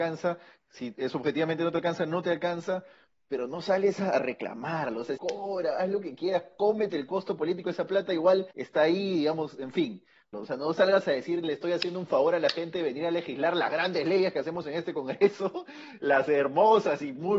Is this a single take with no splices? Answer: no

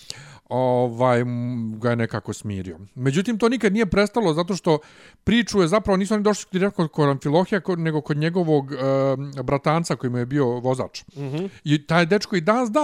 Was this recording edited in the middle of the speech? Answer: no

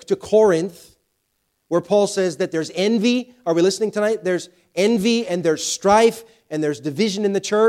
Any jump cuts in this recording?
no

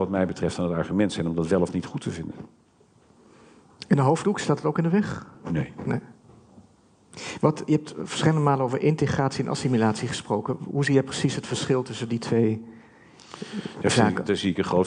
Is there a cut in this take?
no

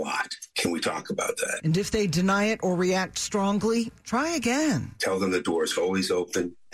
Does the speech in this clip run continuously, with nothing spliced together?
yes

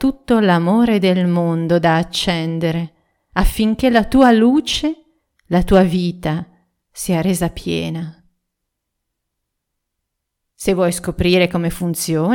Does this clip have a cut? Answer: no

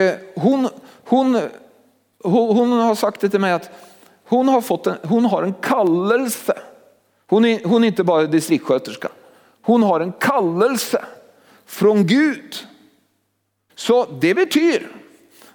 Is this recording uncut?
no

